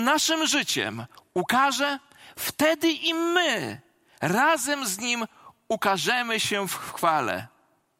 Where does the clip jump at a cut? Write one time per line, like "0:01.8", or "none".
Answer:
none